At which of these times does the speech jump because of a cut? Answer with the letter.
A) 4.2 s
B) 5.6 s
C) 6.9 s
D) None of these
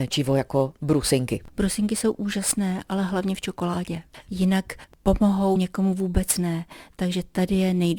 B